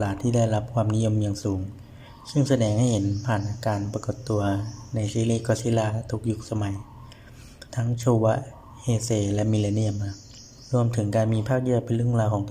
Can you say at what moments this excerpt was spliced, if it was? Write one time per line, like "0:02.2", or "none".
0:07.7